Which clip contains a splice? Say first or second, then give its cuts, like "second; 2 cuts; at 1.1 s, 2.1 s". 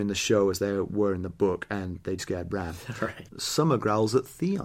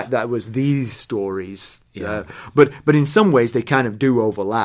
first; 2 cuts; at 2.2 s, 3.3 s